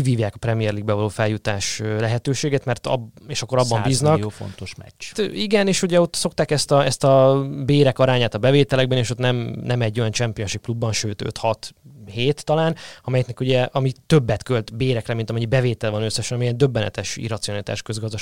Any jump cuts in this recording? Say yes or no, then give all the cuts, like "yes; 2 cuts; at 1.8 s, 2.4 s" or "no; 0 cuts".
yes; 1 cut; at 5.1 s